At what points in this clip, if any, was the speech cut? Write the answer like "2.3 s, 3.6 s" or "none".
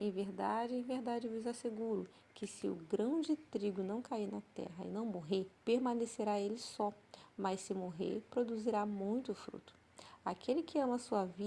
5.6 s